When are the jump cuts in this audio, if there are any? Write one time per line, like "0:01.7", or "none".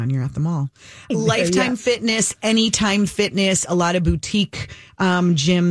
0:01.1